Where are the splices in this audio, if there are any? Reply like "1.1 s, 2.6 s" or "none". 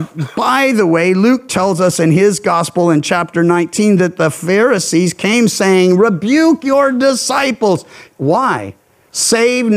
8.2 s